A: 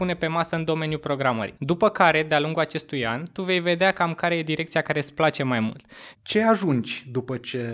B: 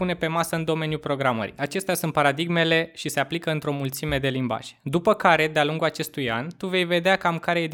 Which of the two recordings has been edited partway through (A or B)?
A